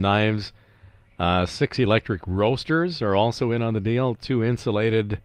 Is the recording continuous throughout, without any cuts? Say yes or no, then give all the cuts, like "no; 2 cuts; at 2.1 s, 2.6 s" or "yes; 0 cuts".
yes; 0 cuts